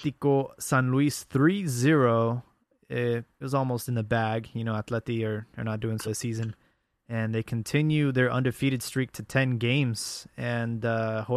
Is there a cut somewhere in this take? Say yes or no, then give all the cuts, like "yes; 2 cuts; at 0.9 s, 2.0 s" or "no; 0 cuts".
yes; 1 cut; at 6.0 s